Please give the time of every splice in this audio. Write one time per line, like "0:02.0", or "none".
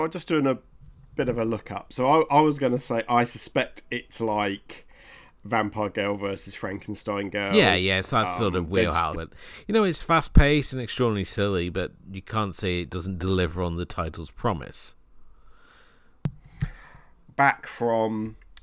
0:09.1
0:17.2